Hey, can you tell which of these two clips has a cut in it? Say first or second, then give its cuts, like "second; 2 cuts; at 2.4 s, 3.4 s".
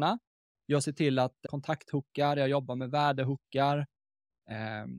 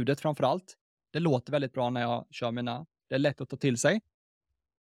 first; 1 cut; at 1.4 s